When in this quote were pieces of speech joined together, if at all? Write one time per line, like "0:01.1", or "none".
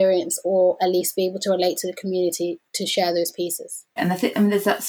0:04.0